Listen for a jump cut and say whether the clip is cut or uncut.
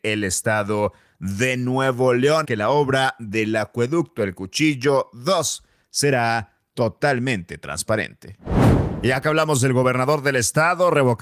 cut